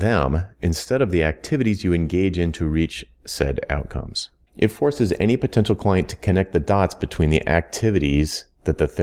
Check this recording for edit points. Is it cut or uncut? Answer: cut